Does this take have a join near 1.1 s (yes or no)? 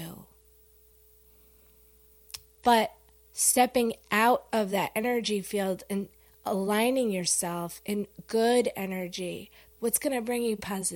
no